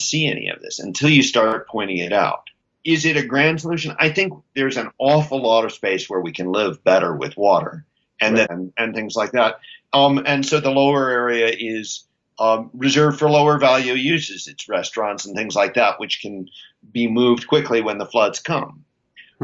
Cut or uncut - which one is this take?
cut